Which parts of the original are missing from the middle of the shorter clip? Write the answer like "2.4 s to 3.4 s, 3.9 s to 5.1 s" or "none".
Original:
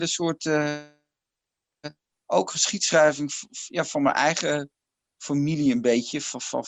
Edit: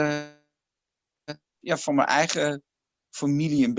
2.2 s to 3.7 s